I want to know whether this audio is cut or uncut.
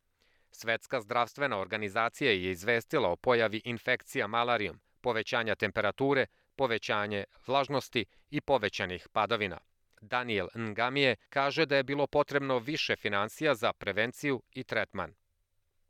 cut